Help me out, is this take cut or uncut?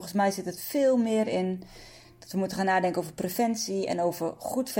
uncut